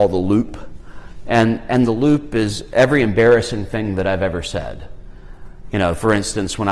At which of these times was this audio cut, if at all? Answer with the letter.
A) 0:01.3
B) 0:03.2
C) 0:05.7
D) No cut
D